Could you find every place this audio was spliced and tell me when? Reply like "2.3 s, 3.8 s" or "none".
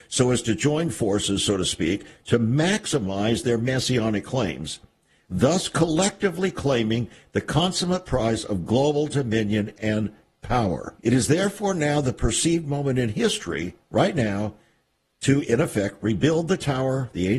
11.0 s